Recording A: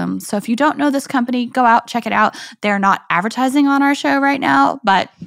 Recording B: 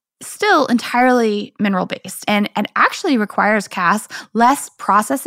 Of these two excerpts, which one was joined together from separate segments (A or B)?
B